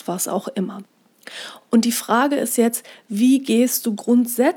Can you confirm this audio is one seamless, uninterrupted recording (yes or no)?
yes